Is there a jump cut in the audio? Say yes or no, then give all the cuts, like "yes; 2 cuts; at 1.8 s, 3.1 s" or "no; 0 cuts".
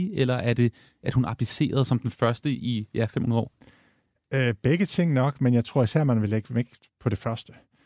no; 0 cuts